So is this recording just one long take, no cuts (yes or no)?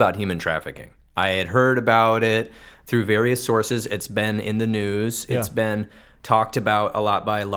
yes